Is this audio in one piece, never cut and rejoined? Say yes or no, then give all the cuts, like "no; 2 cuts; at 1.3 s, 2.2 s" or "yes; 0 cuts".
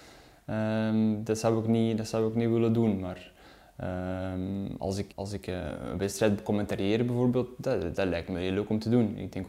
no; 1 cut; at 5.1 s